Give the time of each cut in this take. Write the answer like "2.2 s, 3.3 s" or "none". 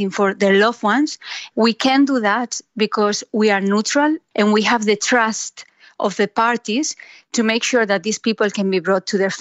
1.5 s, 4.3 s